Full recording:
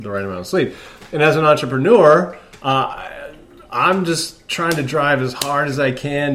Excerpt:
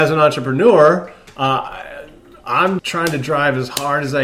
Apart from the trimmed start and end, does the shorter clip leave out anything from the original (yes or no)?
yes